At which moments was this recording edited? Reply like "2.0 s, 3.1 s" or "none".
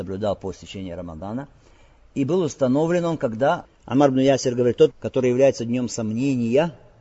3.6 s, 4.9 s